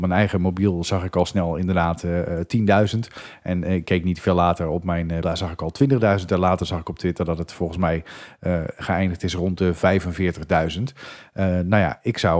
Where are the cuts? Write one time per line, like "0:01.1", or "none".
0:05.2

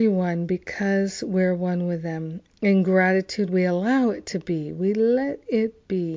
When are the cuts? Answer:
none

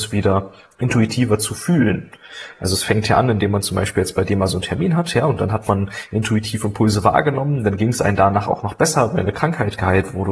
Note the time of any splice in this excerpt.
none

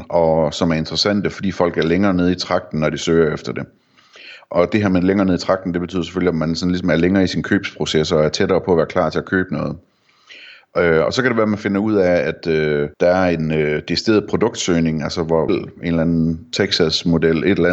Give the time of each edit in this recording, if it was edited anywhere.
0:12.9
0:15.5

